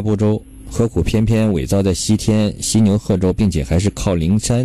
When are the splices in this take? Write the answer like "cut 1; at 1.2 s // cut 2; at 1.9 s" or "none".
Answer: none